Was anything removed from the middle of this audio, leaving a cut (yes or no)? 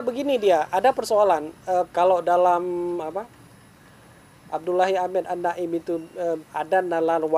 yes